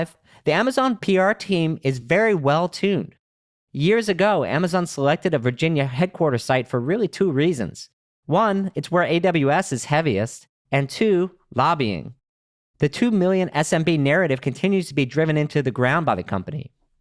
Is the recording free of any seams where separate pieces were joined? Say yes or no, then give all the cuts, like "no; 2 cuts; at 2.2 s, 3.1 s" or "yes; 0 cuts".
yes; 0 cuts